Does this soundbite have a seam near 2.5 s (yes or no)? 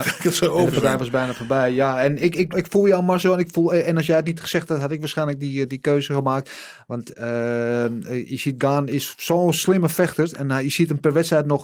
yes